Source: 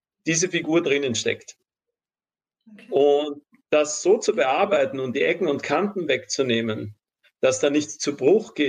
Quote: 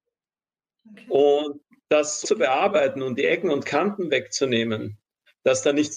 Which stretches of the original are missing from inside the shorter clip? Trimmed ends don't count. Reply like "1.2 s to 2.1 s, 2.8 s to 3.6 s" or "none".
4.0 s to 4.2 s